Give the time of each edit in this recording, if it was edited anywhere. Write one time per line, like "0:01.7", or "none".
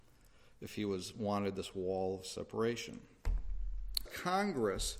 0:04.0